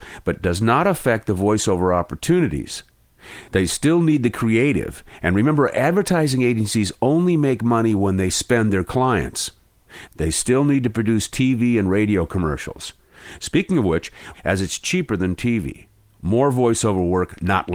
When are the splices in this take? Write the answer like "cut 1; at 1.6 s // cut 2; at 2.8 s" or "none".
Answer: cut 1; at 14.3 s